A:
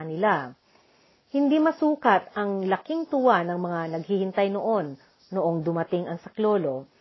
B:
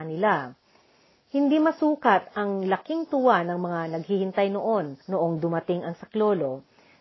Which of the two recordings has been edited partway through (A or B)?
B